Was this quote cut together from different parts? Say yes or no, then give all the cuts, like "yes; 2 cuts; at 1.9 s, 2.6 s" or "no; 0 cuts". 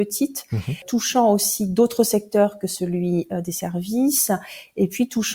no; 0 cuts